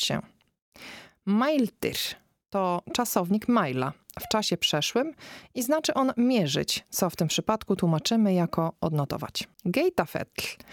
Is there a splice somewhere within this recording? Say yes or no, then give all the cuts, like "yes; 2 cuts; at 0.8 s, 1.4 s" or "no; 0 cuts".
yes; 1 cut; at 9.5 s